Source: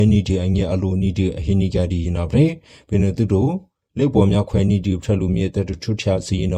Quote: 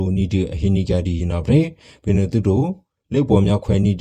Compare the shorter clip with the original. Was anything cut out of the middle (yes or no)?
no